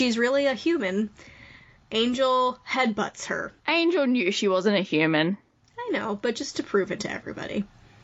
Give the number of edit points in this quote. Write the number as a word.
one